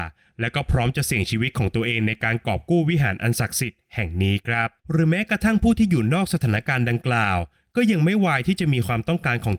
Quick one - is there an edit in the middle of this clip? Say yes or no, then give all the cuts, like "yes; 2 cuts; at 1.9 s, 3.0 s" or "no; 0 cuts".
yes; 1 cut; at 4.8 s